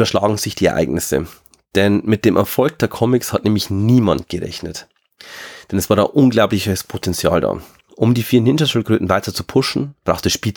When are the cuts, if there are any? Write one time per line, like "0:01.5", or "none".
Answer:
none